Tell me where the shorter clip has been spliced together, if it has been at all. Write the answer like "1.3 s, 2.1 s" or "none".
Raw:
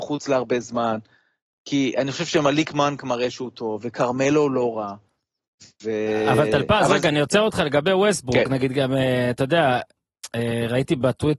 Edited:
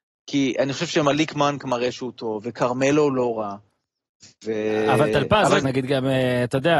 5.6 s

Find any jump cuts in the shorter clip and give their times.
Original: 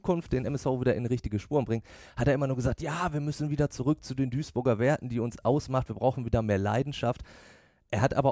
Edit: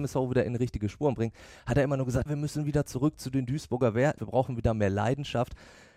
2.3 s, 4.2 s

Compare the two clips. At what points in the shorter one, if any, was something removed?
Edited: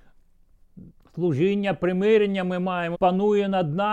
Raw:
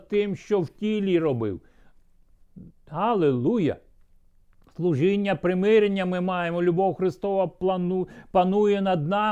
1.0 s, 2.9 s

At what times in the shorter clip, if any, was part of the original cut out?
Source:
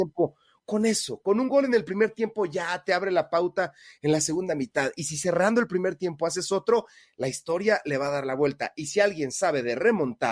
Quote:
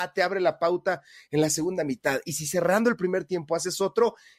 none

